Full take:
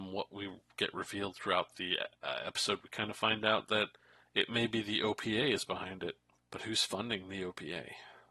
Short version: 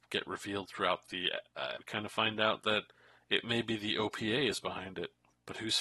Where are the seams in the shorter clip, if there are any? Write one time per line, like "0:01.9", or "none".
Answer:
0:01.8